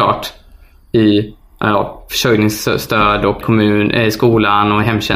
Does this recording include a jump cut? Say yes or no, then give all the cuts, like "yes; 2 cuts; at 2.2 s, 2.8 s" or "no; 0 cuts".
yes; 1 cut; at 3.4 s